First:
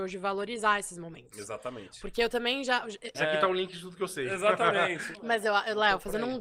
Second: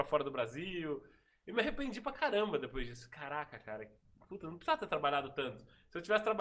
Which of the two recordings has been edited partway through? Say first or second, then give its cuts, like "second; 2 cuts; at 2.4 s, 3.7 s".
first; 2 cuts; at 3.1 s, 5.1 s